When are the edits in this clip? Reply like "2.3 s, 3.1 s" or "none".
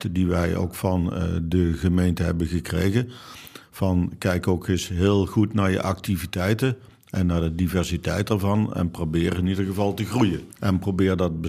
10.5 s